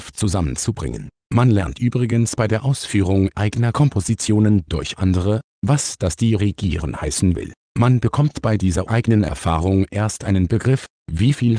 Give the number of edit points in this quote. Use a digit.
0